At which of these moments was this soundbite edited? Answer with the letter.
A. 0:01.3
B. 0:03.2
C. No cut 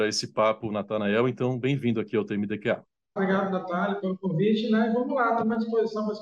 B